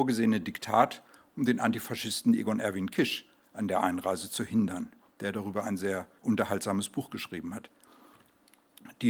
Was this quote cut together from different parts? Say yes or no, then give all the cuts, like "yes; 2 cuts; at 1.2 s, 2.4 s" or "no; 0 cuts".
yes; 1 cut; at 6.2 s